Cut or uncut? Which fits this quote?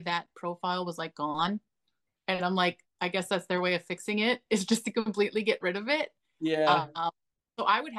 uncut